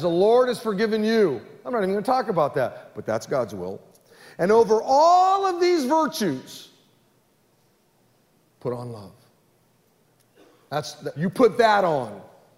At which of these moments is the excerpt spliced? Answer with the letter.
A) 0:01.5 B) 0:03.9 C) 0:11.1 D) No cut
C